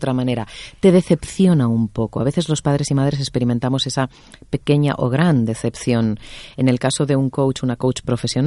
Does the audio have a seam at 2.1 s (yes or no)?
no